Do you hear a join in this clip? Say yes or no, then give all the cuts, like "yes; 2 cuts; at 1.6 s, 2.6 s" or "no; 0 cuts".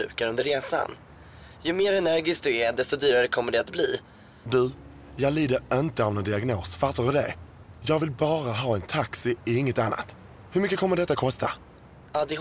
yes; 1 cut; at 4.4 s